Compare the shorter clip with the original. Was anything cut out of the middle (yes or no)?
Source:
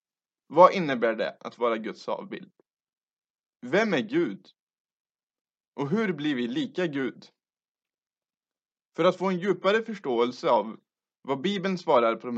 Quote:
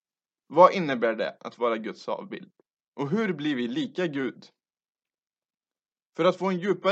yes